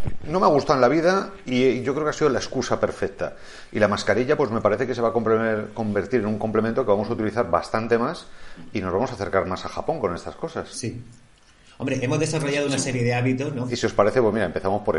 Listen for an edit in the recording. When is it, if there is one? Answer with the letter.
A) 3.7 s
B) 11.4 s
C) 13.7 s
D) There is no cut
C